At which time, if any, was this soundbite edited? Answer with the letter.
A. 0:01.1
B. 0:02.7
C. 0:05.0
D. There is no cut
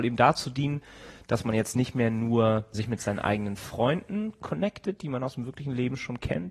B